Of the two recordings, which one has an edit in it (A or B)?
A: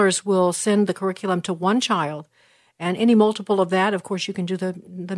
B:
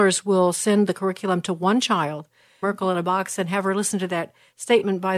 B